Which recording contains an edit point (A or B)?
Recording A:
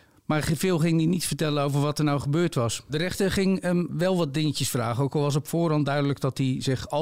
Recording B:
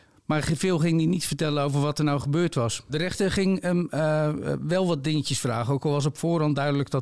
A